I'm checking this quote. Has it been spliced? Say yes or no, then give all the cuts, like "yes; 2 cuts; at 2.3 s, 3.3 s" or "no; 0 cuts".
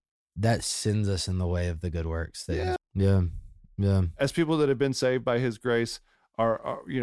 yes; 1 cut; at 2.8 s